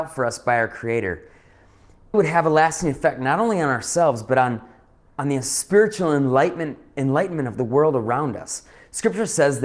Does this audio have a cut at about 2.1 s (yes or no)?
yes